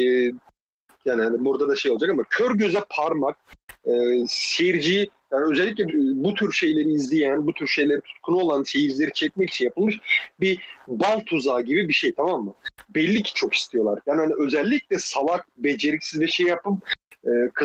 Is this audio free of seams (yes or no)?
no